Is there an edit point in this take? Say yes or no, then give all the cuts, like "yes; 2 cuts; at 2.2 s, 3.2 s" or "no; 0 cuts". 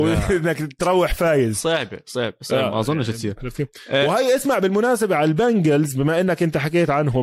no; 0 cuts